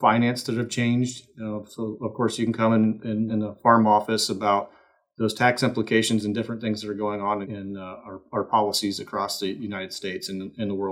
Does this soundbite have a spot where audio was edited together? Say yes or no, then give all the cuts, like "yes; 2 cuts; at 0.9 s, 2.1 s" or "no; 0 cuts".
yes; 2 cuts; at 3.3 s, 7.4 s